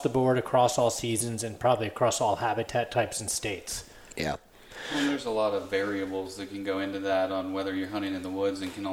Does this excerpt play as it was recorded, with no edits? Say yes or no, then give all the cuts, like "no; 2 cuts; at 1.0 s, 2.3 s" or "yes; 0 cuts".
yes; 0 cuts